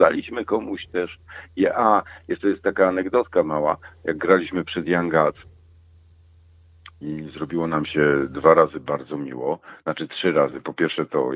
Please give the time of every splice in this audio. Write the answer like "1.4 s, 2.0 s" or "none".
none